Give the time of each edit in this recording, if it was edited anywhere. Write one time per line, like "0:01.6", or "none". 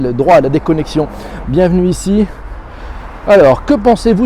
0:01.4